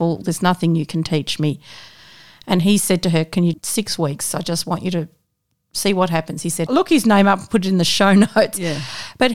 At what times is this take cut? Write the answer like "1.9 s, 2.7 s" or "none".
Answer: 3.5 s, 6.7 s